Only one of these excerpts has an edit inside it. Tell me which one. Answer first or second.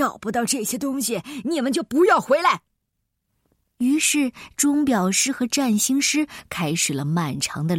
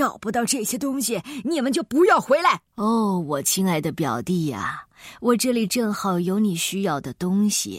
second